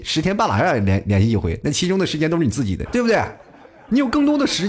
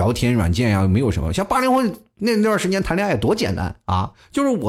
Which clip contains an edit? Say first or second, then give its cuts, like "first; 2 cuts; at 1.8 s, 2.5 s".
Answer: first; 1 cut; at 2.9 s